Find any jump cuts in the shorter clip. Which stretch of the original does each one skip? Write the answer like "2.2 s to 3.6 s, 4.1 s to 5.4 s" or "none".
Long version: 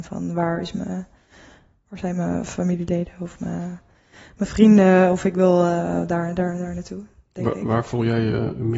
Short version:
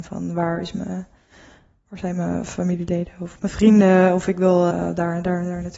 3.4 s to 4.4 s, 5.7 s to 5.8 s